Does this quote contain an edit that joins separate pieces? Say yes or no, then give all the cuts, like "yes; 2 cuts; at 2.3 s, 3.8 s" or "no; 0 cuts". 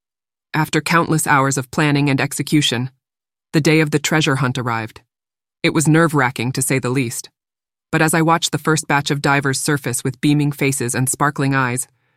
no; 0 cuts